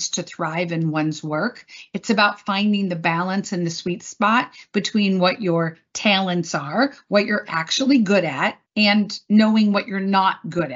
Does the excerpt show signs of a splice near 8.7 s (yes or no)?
yes